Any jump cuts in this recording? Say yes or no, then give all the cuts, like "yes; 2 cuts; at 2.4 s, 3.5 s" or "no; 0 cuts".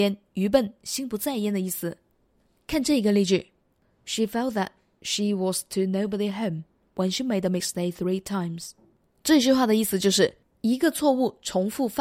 no; 0 cuts